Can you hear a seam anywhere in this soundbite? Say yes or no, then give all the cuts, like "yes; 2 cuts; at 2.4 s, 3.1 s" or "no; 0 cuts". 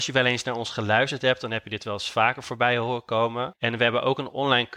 yes; 1 cut; at 3.5 s